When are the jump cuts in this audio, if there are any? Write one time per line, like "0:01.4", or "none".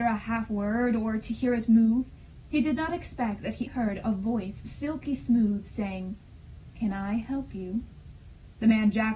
0:03.7